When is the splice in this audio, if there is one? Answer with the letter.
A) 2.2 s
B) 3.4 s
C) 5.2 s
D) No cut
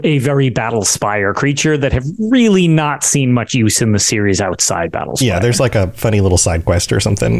D